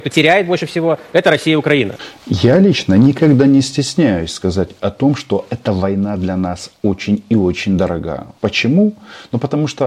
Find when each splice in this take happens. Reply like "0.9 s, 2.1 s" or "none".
8.4 s